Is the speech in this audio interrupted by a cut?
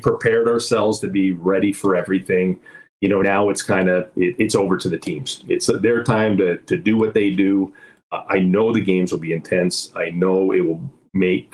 no; 0 cuts

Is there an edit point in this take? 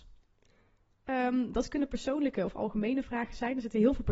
yes; 1 cut; at 1.0 s

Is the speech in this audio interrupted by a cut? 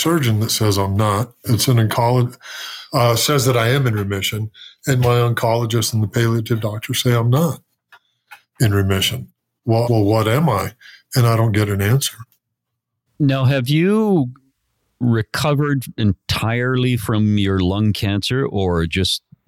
yes; 2 cuts; at 9.9 s, 13.1 s

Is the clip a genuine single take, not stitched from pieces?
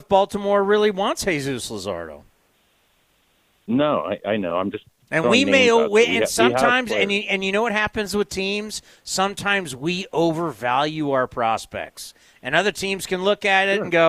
yes; 0 cuts

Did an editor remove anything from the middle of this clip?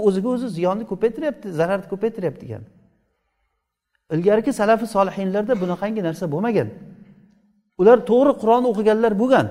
no; 0 cuts

